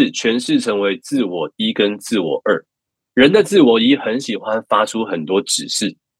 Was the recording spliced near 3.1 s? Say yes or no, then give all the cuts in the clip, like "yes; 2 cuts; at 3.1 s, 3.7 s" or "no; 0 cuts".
yes; 1 cut; at 3.1 s